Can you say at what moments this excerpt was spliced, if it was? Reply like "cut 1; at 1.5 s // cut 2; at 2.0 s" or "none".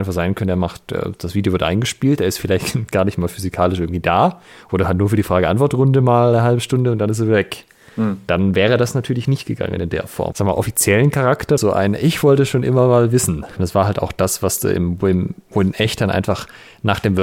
cut 1; at 10.3 s // cut 2; at 11.6 s // cut 3; at 13.6 s